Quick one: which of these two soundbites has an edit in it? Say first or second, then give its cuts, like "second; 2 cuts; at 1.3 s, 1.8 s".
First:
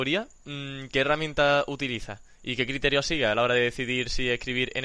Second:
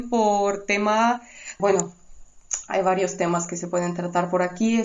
second; 1 cut; at 1.6 s